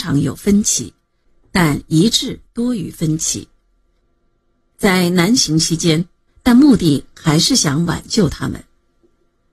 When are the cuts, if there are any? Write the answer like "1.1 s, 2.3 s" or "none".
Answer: 6.3 s